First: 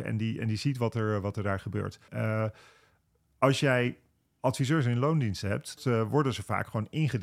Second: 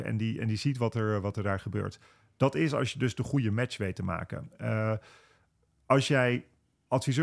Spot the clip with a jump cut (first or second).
first